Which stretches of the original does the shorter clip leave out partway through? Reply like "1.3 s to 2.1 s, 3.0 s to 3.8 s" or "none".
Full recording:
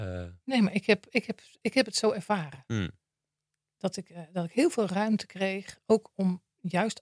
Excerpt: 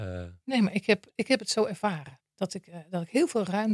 1.1 s to 1.5 s, 2.7 s to 3.6 s